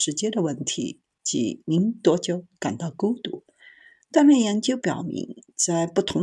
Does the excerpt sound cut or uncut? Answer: cut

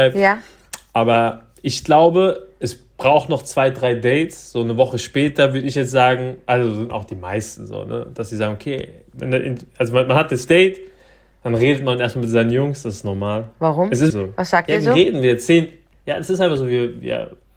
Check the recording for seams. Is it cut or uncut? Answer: cut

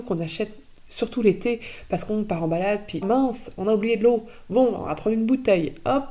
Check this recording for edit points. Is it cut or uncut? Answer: cut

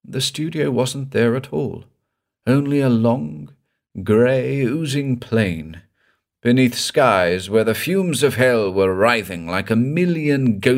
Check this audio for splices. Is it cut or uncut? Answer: uncut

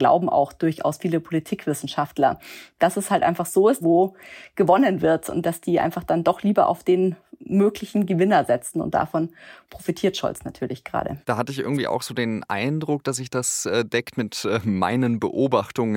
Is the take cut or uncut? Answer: cut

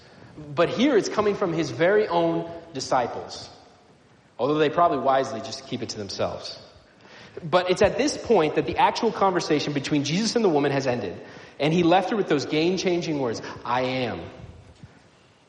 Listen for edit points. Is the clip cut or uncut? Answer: uncut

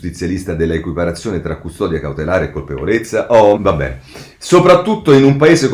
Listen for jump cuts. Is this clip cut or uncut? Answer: cut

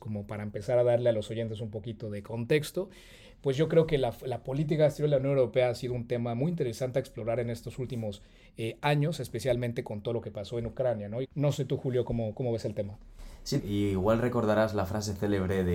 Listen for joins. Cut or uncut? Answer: cut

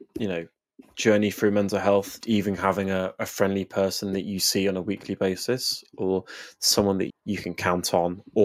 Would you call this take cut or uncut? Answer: cut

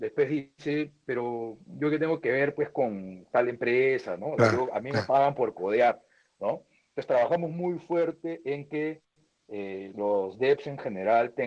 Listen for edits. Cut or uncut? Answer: cut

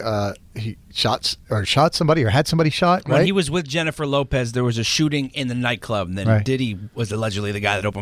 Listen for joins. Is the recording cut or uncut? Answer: uncut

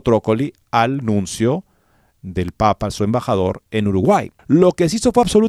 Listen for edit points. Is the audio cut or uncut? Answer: cut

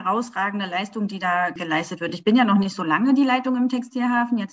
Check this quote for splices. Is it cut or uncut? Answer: uncut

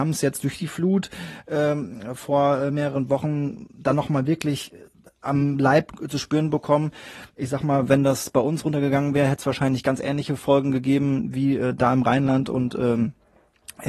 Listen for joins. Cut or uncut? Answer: uncut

